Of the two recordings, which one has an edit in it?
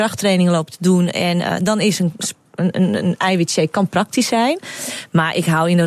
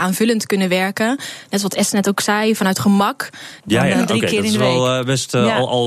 second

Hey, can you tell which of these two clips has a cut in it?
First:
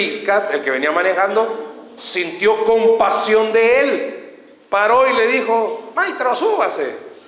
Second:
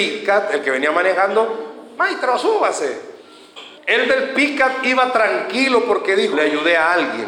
second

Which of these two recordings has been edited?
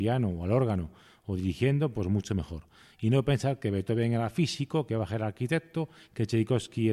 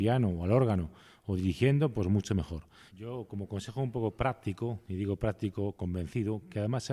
second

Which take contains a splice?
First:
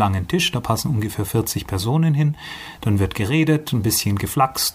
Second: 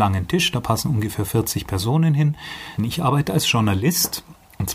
second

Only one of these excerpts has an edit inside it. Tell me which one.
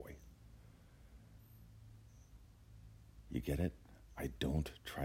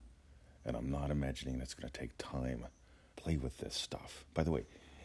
second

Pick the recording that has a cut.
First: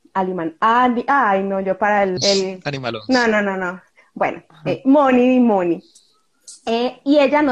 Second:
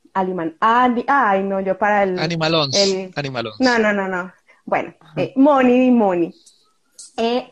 first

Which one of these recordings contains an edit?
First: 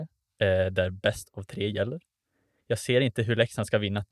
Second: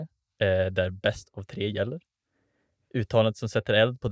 first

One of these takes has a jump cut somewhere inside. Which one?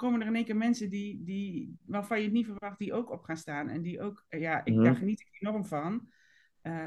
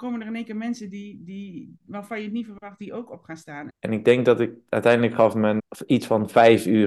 second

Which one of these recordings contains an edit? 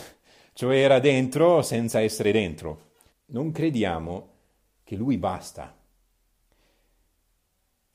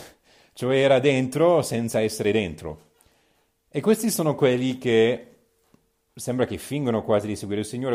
first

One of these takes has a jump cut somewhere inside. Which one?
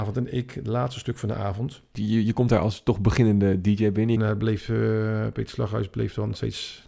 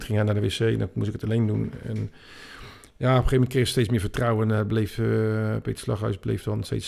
first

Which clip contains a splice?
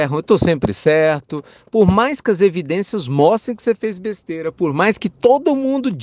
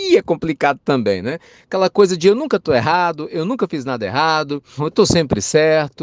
second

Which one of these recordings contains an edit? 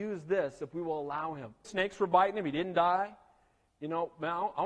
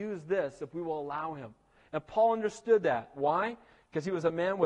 first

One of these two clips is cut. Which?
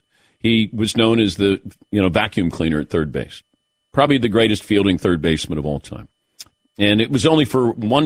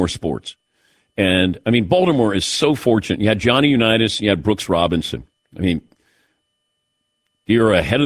first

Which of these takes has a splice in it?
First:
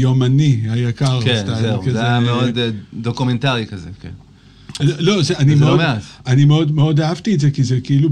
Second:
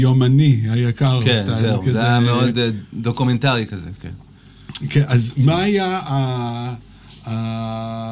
first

